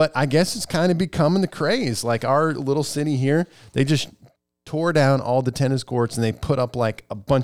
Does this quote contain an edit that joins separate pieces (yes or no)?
no